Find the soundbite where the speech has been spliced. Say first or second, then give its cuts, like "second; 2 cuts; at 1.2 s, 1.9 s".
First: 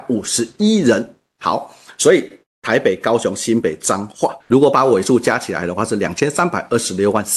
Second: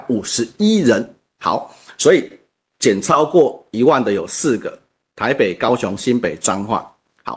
first; 2 cuts; at 2.4 s, 4.4 s